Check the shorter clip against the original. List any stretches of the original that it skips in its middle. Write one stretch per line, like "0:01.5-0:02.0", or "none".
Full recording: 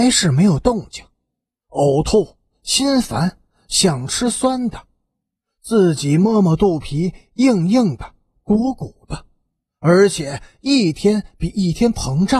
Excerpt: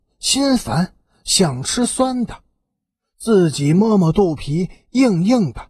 none